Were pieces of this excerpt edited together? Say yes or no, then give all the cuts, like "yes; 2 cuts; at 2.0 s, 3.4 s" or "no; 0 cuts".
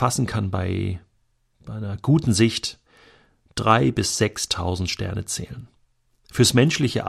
no; 0 cuts